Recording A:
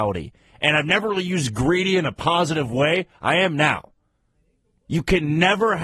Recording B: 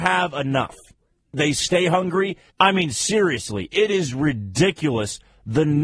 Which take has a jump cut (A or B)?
B